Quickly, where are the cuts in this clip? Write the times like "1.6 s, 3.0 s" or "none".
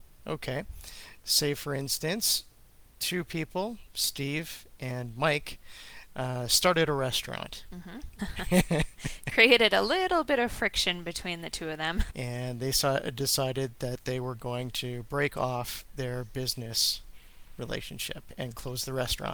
8.2 s, 12.1 s